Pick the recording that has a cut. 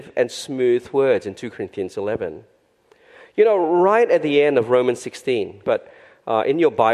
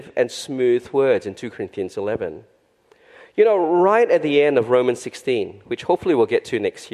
first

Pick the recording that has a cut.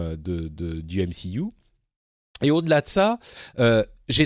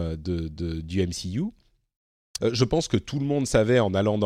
second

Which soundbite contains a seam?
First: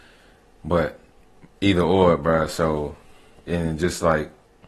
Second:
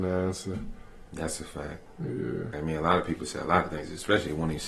second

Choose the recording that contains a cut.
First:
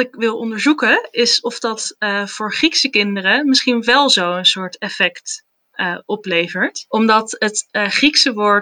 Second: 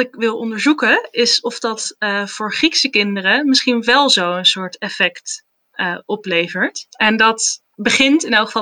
second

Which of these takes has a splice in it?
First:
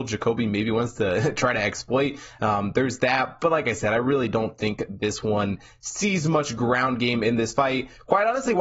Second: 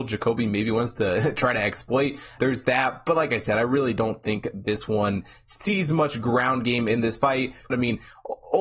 second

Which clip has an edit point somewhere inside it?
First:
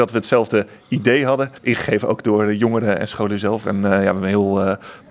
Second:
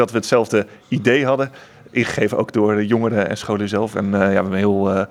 first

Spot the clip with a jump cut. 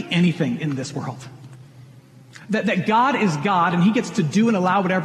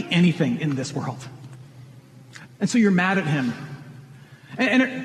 second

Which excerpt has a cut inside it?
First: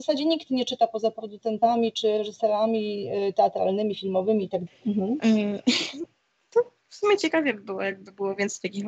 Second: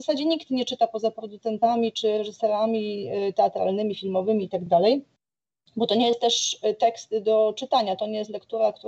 first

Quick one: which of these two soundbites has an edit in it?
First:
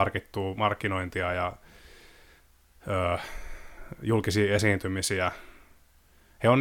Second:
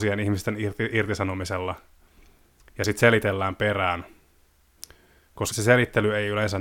second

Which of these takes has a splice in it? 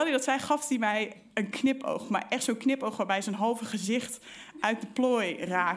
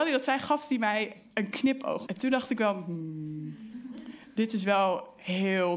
second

